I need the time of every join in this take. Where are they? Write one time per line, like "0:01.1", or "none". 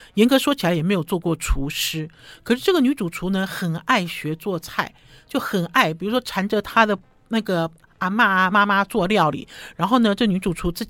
none